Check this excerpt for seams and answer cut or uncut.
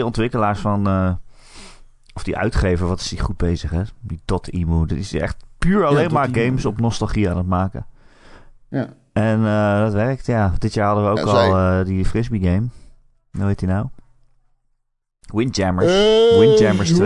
uncut